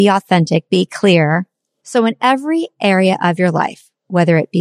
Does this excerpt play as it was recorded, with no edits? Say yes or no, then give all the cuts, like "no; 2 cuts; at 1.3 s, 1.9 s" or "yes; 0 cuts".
no; 1 cut; at 1.8 s